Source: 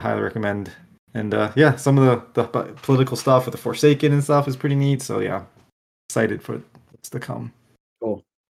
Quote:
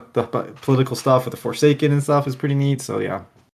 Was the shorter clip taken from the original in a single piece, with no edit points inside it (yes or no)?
yes